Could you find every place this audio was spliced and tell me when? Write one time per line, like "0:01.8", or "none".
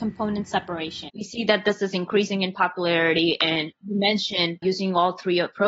0:04.6